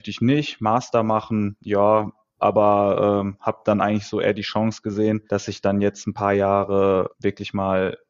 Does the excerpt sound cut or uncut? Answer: cut